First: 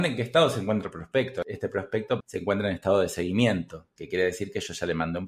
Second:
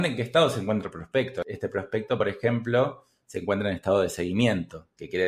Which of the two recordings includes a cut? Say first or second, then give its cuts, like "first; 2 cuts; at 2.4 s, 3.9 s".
first; 1 cut; at 2.2 s